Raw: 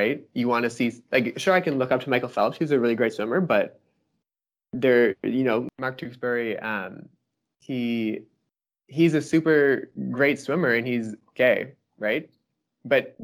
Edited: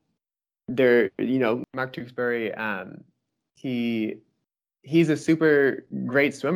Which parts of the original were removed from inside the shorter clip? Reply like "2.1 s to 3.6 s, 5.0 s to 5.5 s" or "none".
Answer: none